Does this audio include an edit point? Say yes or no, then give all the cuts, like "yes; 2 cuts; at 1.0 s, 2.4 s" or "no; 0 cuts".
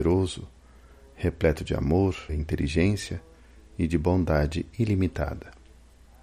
yes; 1 cut; at 2.3 s